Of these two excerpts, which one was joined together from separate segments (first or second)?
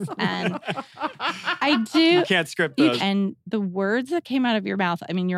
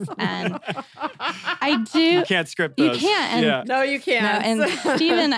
first